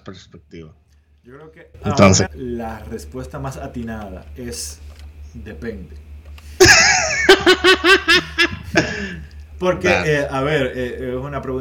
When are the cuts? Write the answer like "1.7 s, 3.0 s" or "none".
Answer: 2.3 s